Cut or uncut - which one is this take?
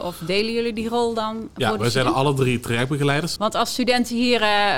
cut